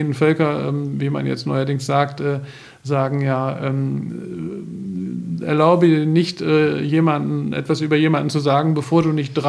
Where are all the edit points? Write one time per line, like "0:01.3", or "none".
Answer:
none